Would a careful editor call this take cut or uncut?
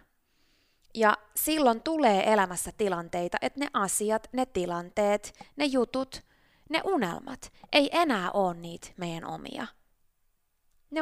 uncut